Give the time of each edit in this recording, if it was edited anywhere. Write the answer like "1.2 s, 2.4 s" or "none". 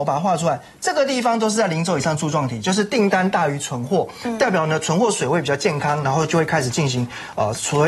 none